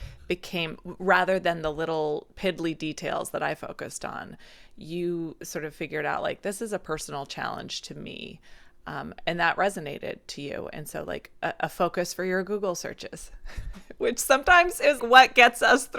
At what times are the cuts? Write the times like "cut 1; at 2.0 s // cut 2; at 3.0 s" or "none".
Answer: cut 1; at 15.0 s